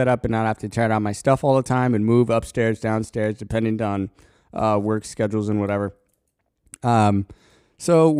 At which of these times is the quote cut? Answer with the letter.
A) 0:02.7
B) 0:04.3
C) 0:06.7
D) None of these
D